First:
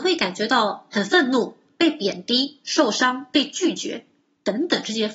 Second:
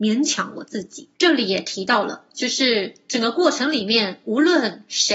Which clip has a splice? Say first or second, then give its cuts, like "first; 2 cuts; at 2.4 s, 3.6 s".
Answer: second; 1 cut; at 1.1 s